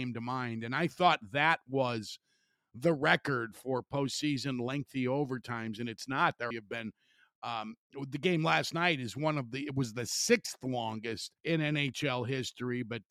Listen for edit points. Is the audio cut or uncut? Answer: cut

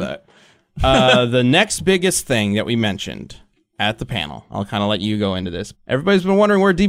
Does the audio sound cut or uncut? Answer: cut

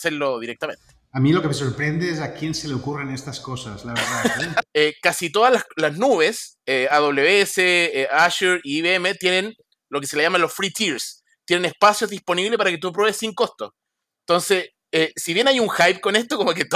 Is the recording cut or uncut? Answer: cut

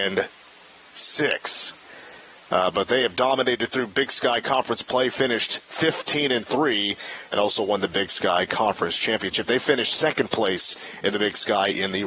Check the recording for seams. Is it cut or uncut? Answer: uncut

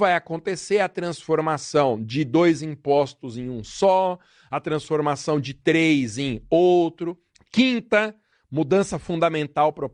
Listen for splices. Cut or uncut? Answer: cut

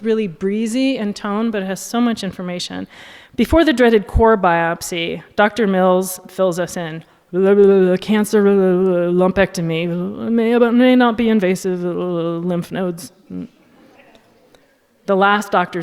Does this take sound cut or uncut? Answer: uncut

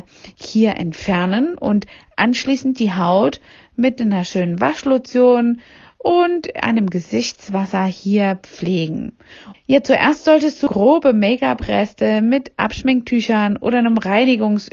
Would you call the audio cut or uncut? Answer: cut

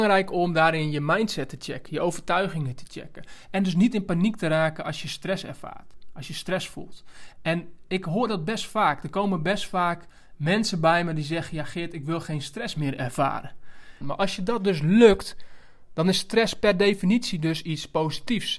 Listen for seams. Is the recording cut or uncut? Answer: cut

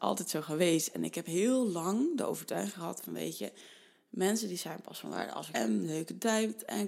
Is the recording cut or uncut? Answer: cut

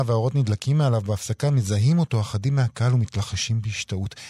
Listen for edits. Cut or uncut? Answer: uncut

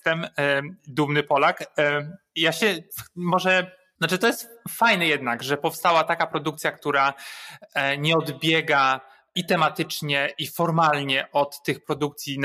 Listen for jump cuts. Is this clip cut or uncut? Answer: uncut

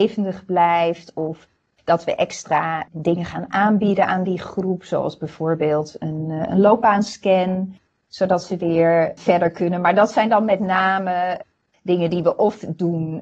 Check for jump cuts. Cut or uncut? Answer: uncut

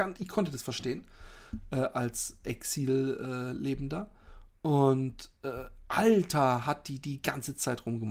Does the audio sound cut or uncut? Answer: uncut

